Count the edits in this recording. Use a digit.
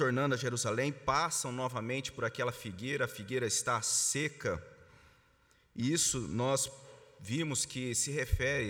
0